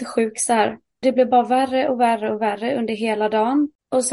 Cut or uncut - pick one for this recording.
cut